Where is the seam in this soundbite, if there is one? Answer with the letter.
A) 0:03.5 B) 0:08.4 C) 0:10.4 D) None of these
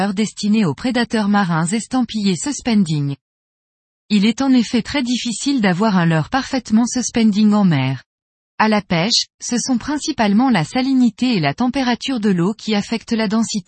B